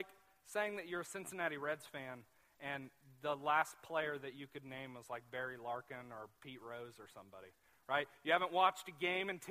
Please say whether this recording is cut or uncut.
uncut